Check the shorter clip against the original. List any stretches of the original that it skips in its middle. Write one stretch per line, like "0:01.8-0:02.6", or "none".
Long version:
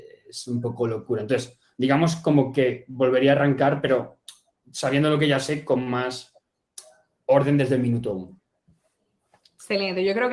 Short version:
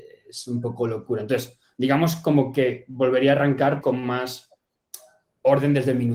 0:03.8-0:05.6